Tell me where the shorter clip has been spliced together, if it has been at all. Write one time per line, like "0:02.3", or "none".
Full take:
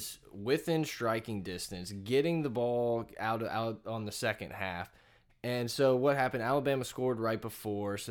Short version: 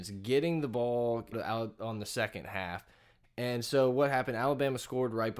0:01.3

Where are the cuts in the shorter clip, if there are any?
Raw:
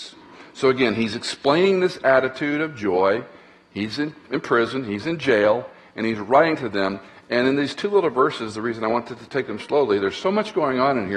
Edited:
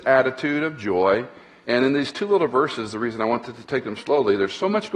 0:01.6

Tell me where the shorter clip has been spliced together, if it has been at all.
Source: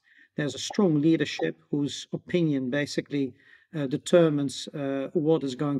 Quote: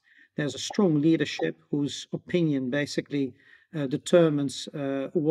none

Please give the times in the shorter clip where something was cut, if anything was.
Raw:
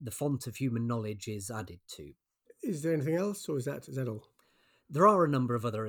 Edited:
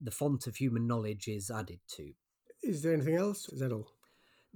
0:03.5

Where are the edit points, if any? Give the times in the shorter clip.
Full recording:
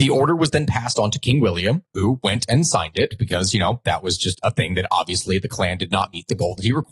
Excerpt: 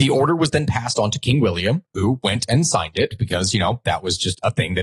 none

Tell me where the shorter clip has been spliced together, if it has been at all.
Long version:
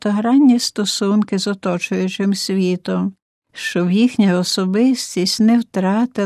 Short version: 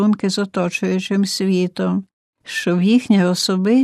none

